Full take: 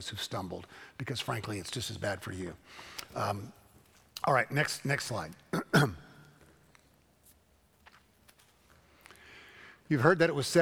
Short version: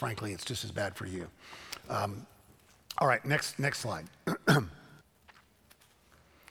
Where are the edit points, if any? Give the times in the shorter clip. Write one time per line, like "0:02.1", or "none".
0:05.0